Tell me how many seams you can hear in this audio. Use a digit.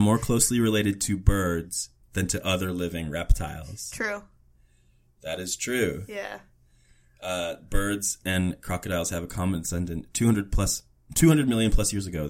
0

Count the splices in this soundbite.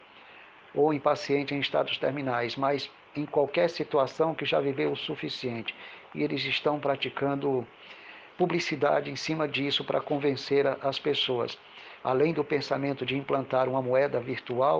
1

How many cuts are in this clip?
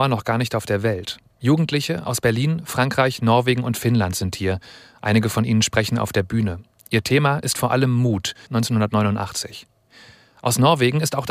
1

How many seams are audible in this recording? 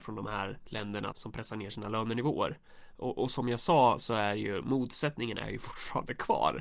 1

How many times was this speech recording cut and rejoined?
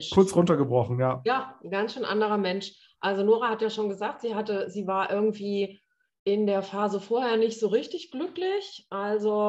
0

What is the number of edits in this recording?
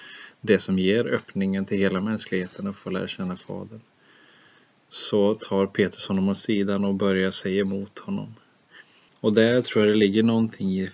1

